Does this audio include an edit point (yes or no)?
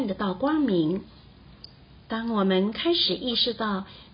yes